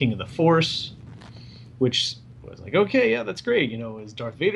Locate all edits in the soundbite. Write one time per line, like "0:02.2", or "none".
none

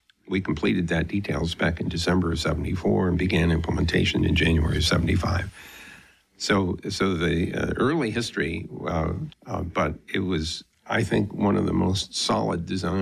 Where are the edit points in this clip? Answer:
0:09.3

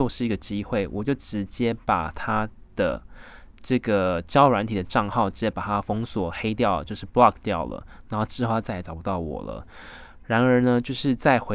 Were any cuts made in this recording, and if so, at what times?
0:03.5

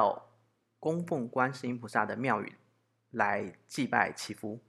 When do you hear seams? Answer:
none

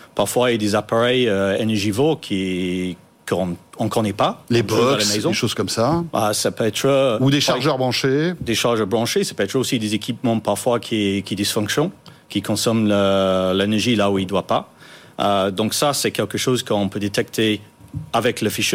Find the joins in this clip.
none

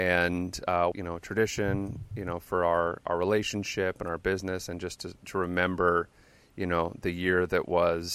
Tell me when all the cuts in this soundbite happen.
0:00.9

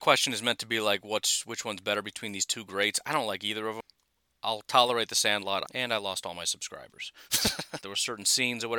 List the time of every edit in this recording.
0:05.6
0:07.8

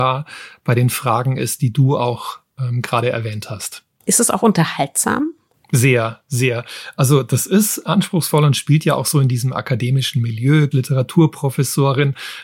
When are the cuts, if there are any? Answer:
0:04.1
0:10.7

